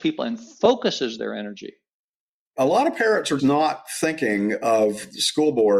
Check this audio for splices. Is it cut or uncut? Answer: cut